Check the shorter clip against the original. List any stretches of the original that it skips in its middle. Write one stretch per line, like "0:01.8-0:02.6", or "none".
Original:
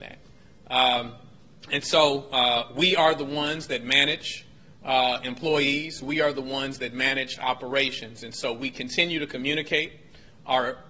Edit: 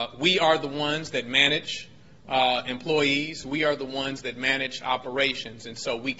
none